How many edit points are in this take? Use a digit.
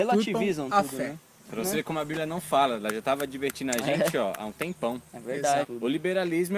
2